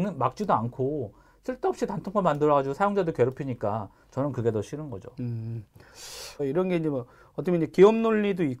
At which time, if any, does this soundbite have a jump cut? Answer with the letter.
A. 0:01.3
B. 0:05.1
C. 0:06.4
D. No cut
C